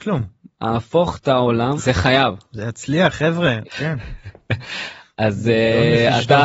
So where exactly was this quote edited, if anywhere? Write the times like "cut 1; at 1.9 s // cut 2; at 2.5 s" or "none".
cut 1; at 1.8 s // cut 2; at 3.6 s